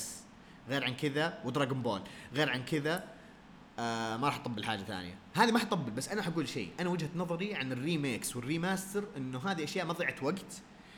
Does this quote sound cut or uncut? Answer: uncut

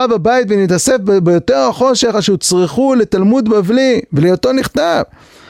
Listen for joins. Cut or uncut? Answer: uncut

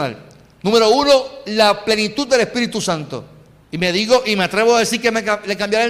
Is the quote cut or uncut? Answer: cut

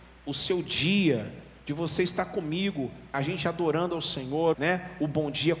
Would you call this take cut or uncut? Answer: cut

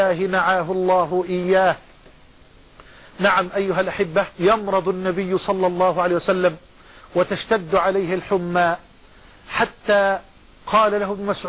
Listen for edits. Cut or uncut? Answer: cut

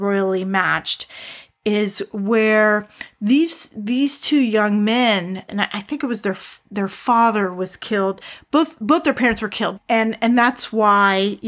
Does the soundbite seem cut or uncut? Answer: cut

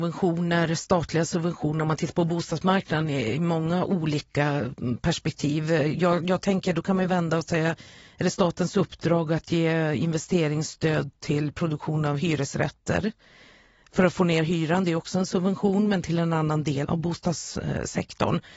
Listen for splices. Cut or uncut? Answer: cut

